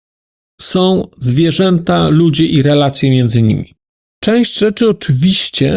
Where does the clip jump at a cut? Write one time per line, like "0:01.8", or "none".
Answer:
none